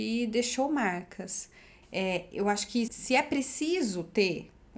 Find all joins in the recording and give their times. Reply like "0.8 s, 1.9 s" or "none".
1.8 s, 2.9 s